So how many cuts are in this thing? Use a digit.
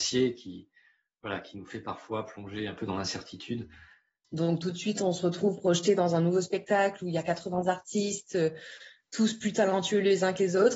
1